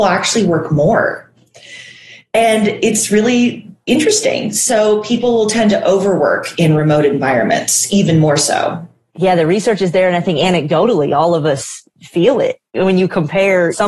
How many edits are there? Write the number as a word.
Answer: zero